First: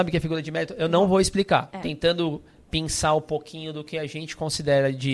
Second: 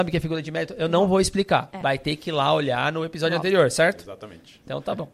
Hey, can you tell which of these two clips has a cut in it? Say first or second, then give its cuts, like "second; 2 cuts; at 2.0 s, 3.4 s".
first; 1 cut; at 1.8 s